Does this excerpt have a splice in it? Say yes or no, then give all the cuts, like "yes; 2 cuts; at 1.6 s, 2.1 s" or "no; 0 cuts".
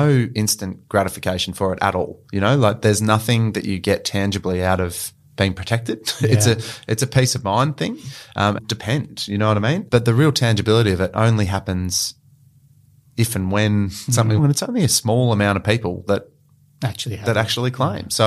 yes; 2 cuts; at 8.6 s, 14.4 s